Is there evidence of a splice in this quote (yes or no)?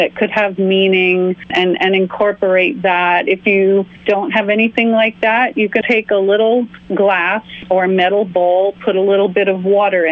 yes